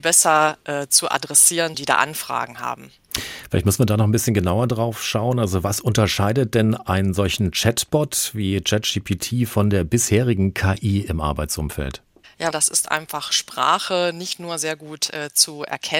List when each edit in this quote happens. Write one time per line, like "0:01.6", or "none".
0:01.7
0:12.5